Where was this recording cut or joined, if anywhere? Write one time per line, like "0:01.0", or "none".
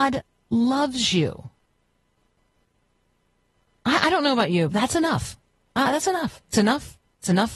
0:04.7